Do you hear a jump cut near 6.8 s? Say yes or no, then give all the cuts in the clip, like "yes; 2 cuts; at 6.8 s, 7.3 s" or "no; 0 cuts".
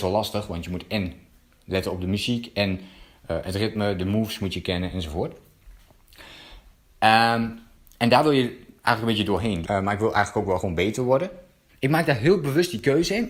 no; 2 cuts; at 9.6 s, 11.7 s